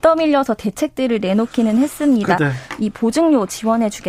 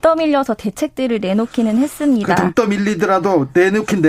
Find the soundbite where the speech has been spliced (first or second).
first